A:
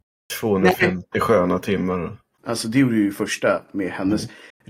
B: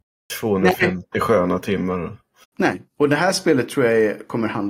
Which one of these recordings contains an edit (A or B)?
A